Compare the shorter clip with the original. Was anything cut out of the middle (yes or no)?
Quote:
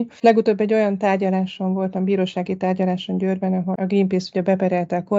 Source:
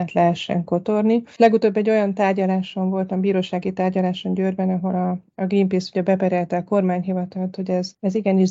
yes